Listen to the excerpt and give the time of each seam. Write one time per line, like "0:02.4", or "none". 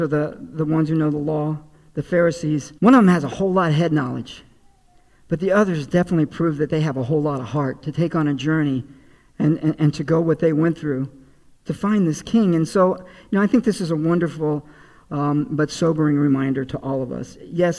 0:02.8

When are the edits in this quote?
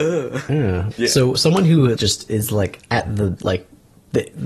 0:00.9
0:02.0
0:03.4

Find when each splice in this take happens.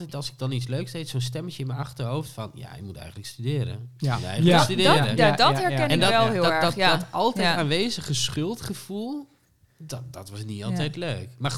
none

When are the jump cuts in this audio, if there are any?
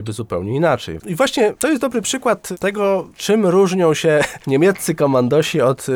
0:01.0

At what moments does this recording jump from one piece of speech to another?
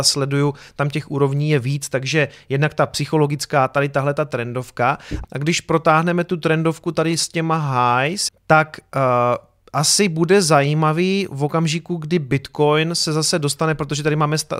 0:05.2
0:08.3

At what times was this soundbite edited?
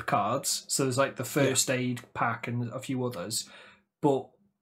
none

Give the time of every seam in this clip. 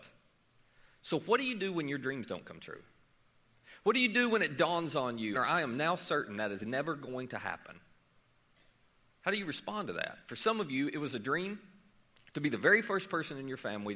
0:05.3

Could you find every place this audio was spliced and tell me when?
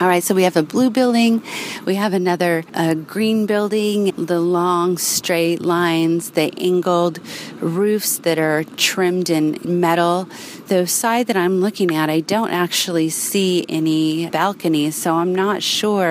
0:04.1
0:10.6

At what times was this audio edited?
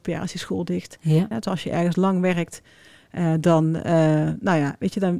0:01.3

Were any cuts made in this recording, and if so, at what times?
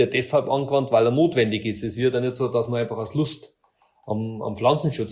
none

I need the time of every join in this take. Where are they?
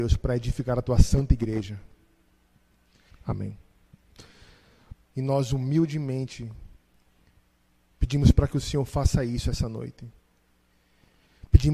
0:03.1
0:04.9

